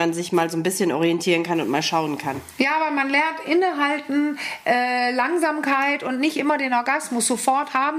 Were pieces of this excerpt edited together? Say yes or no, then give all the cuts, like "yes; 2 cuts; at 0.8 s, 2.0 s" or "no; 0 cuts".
no; 0 cuts